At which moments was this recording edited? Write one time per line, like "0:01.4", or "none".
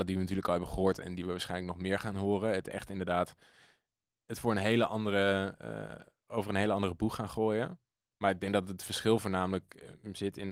none